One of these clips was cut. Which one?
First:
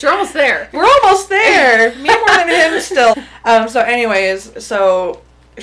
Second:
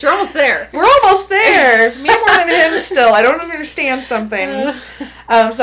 first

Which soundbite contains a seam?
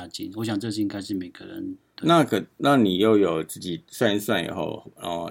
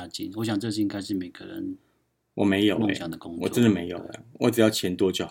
first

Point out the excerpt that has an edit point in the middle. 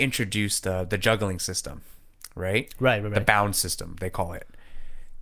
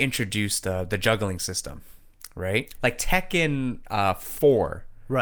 second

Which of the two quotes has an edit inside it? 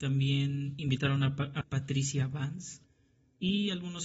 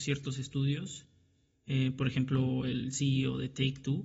first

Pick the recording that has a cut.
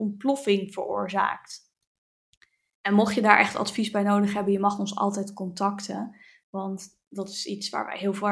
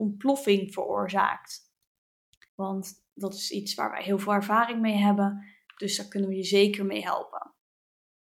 second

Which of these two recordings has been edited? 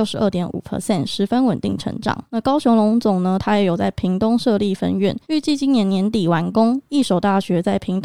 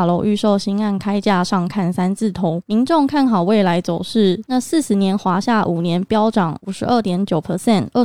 second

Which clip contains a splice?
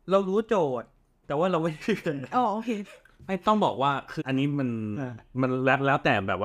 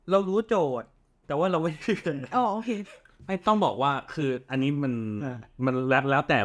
first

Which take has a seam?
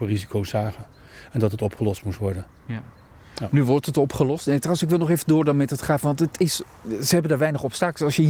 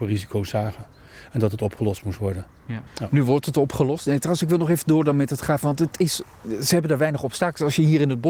second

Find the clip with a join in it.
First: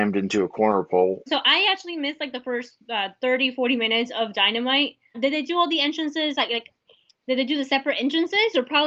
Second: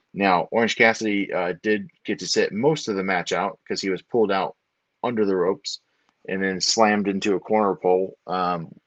first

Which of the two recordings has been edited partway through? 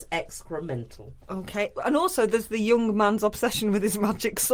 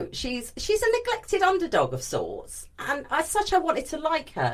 first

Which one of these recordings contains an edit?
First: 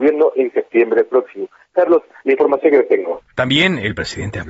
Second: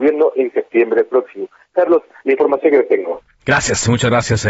first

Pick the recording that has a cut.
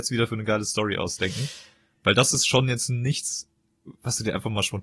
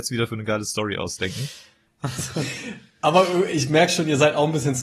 second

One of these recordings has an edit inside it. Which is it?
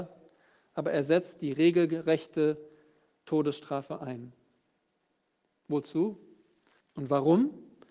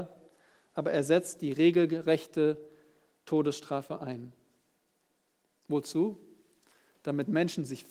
first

